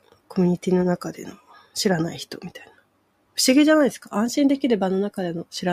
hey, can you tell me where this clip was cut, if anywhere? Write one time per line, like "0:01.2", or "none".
none